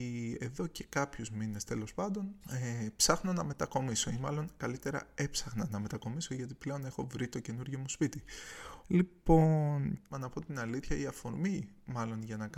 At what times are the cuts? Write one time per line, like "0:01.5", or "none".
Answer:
0:02.4
0:08.8
0:10.1